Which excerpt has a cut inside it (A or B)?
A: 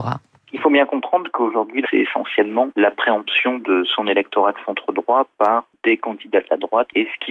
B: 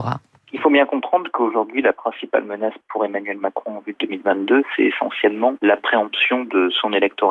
A